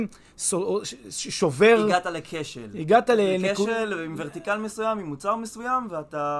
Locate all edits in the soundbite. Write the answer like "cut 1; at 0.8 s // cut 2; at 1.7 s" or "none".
none